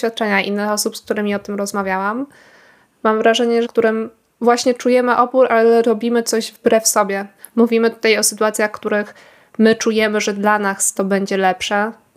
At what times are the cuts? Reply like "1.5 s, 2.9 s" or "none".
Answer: 3.7 s

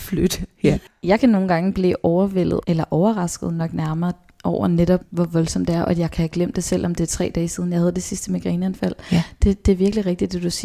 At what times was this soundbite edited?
none

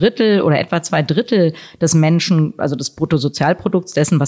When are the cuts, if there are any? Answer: none

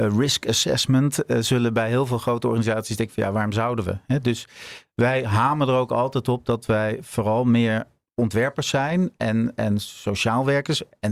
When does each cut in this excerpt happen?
9.6 s

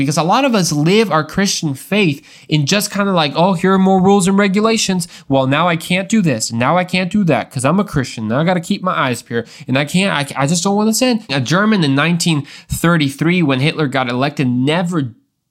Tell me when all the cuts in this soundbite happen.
11.3 s

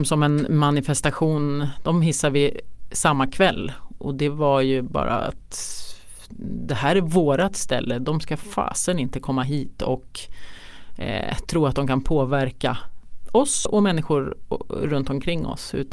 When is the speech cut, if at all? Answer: 13.7 s

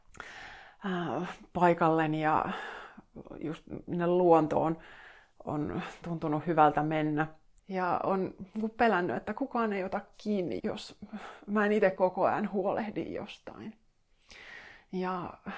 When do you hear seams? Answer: 7.6 s, 10.6 s

